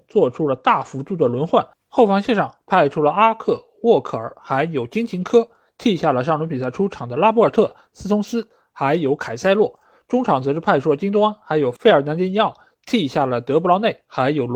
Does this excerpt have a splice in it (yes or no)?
no